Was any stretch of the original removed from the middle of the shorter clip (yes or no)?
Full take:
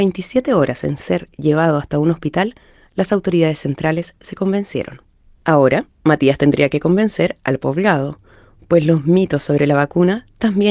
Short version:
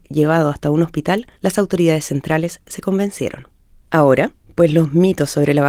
yes